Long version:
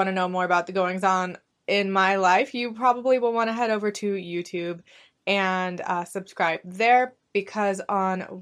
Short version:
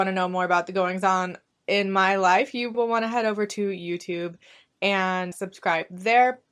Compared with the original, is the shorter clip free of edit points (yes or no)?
no